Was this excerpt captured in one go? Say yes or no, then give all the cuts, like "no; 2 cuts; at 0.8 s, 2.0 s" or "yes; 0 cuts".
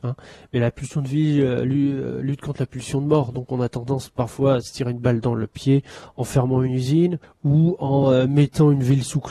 yes; 0 cuts